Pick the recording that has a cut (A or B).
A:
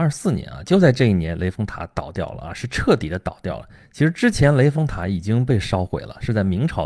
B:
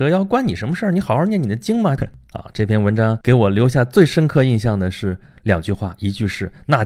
B